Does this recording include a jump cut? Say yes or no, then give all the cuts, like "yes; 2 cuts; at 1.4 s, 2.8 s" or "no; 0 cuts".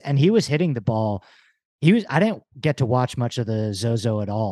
no; 0 cuts